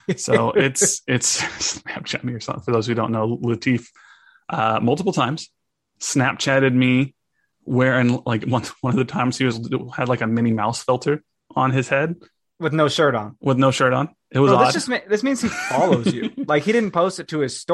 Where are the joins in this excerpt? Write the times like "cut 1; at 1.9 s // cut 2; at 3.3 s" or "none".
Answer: none